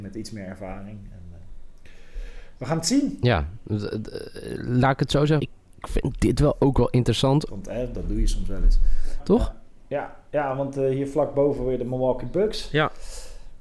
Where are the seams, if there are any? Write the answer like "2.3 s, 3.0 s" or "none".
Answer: 5.4 s, 7.5 s, 9.2 s